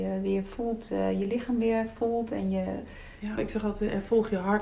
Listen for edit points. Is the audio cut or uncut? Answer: cut